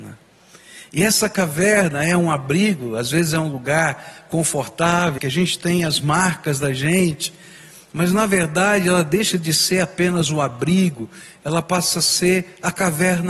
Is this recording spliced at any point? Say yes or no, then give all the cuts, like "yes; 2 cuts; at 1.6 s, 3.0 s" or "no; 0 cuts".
yes; 1 cut; at 5.2 s